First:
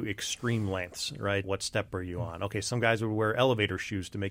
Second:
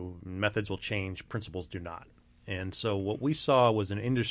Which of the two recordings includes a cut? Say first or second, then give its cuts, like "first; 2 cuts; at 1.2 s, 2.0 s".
first; 1 cut; at 1.4 s